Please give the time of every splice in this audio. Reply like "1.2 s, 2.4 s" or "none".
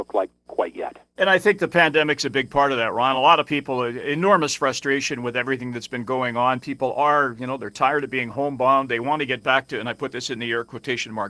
none